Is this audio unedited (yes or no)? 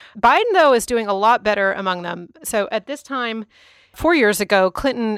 yes